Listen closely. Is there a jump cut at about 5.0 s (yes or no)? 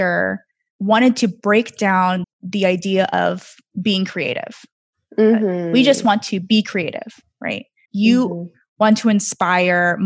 no